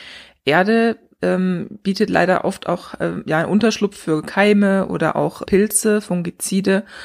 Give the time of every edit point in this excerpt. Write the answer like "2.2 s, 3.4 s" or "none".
5.4 s